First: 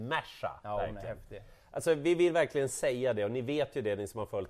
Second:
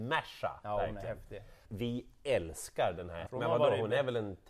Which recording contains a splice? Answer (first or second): second